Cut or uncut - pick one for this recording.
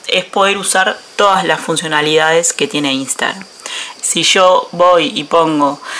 cut